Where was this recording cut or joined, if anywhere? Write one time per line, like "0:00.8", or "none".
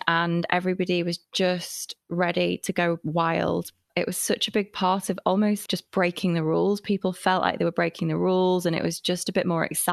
0:05.7